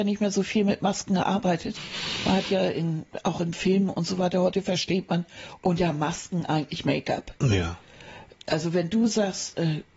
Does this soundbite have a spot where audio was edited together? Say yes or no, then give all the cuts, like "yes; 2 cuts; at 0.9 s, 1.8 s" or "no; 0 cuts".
no; 0 cuts